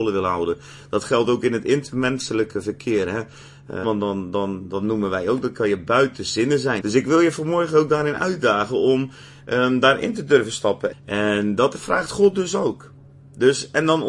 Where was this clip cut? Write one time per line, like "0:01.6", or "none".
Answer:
0:03.8
0:06.8
0:10.9